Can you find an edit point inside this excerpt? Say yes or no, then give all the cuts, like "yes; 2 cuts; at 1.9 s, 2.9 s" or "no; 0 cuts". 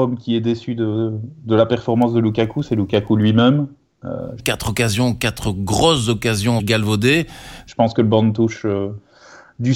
yes; 3 cuts; at 4.4 s, 6.6 s, 7.7 s